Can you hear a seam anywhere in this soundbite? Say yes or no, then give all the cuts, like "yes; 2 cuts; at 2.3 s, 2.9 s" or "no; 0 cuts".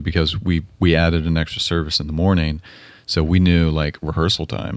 no; 0 cuts